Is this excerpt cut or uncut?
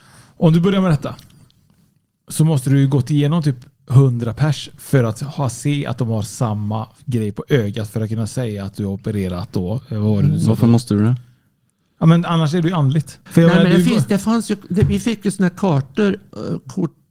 cut